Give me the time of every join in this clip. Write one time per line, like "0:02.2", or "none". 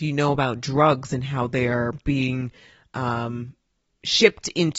none